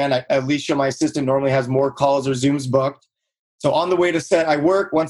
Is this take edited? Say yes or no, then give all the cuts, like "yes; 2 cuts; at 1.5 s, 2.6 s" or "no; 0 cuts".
no; 0 cuts